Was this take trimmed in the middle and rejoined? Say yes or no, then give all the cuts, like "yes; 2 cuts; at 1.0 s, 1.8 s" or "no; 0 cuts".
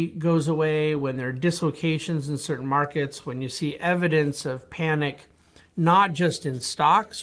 no; 0 cuts